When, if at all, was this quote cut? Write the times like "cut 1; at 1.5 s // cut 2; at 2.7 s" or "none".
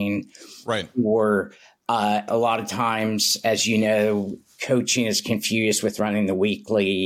cut 1; at 2.3 s